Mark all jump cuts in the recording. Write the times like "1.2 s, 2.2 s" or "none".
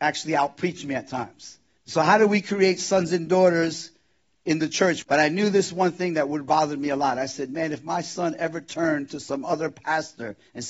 1.8 s, 5.0 s